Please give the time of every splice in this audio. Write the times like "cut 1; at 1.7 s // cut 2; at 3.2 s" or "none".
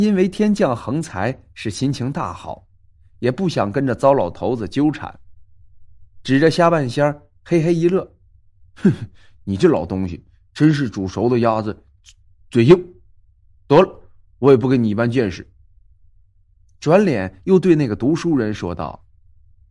none